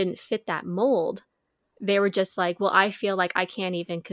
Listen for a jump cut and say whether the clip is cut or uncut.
uncut